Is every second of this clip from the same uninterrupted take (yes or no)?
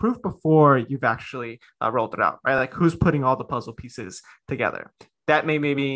yes